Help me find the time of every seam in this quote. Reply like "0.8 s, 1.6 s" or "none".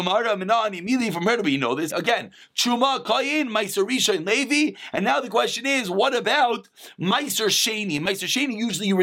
1.9 s